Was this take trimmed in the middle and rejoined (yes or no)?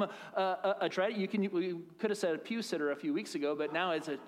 yes